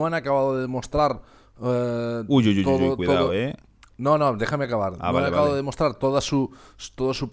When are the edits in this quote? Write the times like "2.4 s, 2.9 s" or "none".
none